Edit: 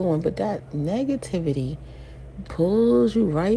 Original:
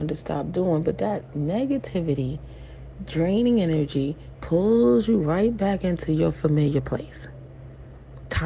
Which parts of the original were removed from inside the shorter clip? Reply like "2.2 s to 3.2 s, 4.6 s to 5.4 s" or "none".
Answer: 3.1 s to 4.4 s